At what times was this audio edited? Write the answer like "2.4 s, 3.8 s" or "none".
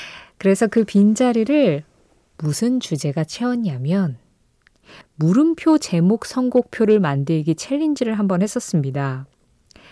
5.0 s